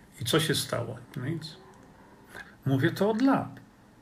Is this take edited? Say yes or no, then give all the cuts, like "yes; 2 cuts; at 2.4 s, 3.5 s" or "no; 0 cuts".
yes; 2 cuts; at 1.0 s, 2.4 s